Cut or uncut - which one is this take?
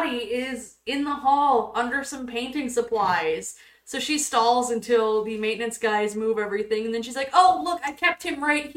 uncut